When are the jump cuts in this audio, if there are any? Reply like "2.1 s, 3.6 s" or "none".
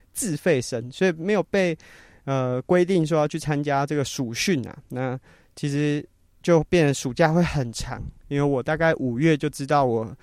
none